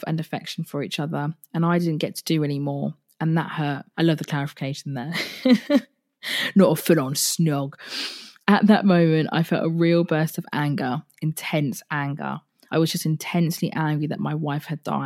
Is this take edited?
yes; 2 cuts; at 3.9 s, 12.7 s

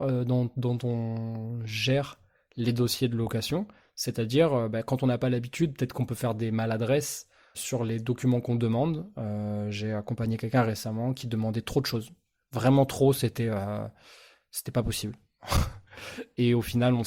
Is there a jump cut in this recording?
yes; 1 cut; at 7.5 s

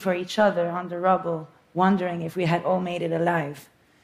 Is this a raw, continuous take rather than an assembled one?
yes; 0 cuts

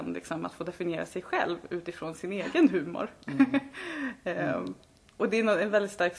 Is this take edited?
no; 0 cuts

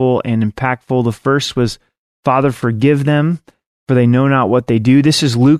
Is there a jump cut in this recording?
no; 0 cuts

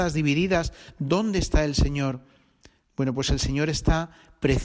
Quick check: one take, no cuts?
yes; 0 cuts

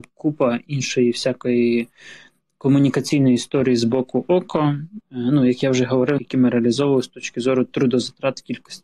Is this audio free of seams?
no; 2 cuts; at 5.0 s, 6.2 s

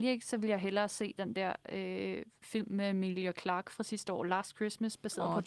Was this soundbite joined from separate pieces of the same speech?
no; 0 cuts

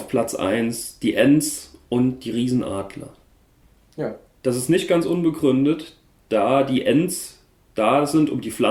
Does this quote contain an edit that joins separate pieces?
no; 0 cuts

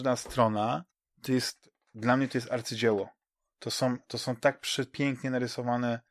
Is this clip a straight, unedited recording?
yes; 0 cuts

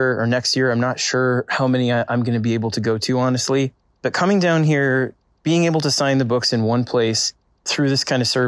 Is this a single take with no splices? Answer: yes; 0 cuts

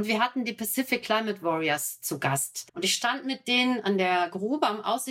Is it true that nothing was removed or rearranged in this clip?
no; 1 cut; at 2.7 s

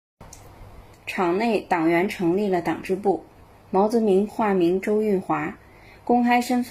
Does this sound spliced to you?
yes; 1 cut; at 0.9 s

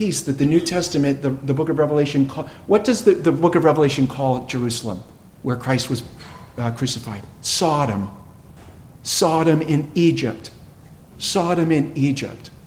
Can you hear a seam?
no; 0 cuts

